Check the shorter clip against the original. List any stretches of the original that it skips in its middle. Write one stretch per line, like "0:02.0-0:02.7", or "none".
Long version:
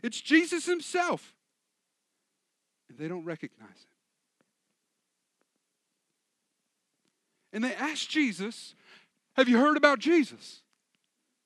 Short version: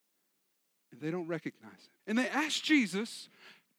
0:04.0-0:07.5